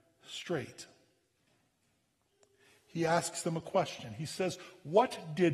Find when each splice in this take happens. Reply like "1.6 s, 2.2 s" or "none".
none